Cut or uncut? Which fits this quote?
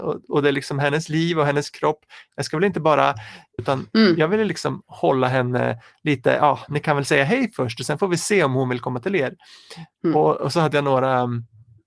cut